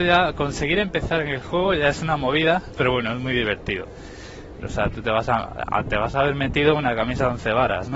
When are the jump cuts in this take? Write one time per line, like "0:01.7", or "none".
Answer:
0:04.6